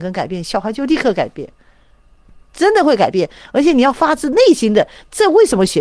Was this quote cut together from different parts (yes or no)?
no